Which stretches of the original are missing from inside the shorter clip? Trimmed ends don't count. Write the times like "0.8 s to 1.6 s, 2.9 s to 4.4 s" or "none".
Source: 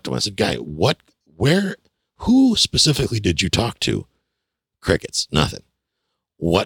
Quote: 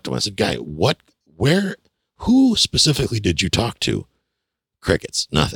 none